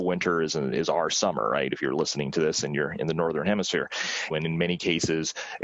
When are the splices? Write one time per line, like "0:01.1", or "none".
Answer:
0:04.3